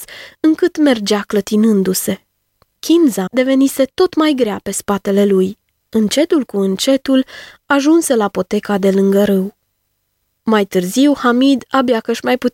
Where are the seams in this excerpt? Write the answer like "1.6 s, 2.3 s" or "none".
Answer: 3.3 s, 5.8 s